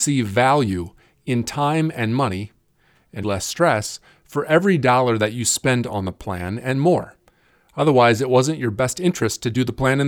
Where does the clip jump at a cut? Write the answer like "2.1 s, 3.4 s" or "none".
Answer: 3.2 s